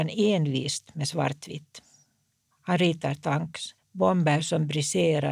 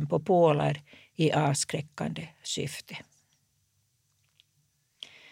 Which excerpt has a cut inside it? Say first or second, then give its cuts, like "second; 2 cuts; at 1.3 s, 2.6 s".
first; 1 cut; at 3.8 s